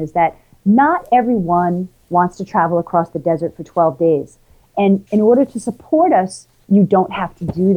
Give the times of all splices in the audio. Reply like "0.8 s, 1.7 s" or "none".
none